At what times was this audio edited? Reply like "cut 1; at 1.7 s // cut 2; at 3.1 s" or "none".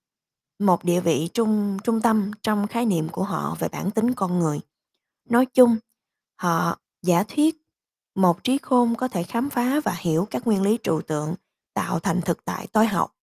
none